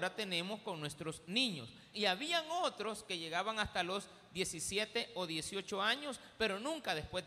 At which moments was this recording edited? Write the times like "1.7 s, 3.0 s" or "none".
1.9 s